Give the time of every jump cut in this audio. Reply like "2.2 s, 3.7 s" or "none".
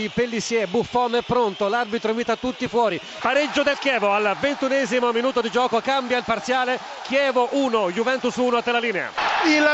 3.2 s

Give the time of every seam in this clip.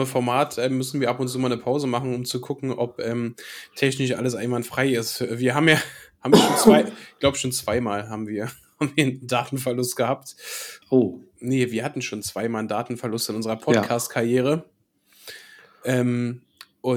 10.8 s

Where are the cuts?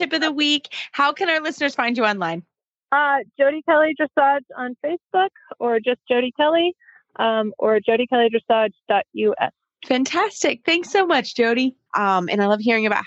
11.9 s

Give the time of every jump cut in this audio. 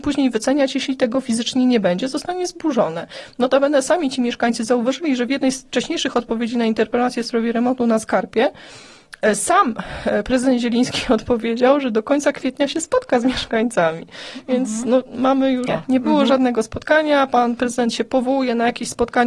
15.7 s

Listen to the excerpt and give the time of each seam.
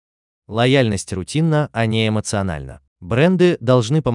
2.9 s

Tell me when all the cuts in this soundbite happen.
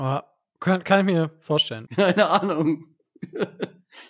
1.9 s

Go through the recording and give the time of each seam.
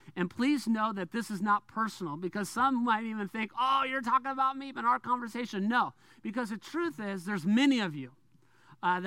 4.7 s

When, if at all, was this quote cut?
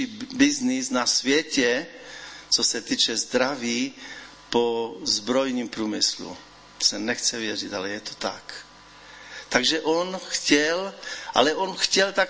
none

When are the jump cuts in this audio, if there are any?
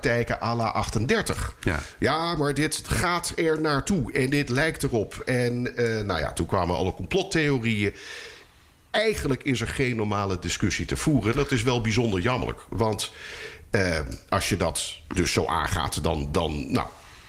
none

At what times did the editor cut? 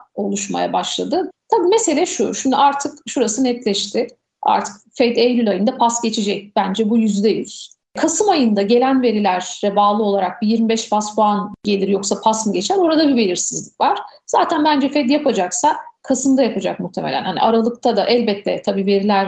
1.3 s

